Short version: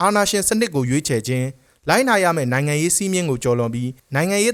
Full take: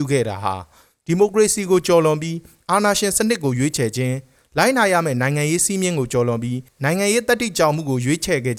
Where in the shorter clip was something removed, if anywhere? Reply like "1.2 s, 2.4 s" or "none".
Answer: none